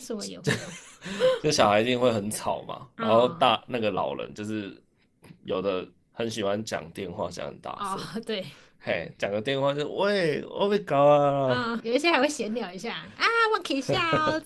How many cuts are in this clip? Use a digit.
1